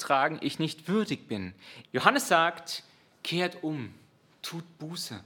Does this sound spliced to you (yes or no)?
yes